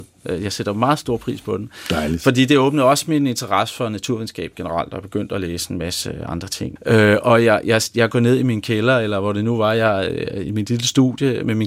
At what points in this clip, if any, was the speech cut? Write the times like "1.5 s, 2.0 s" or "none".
6.8 s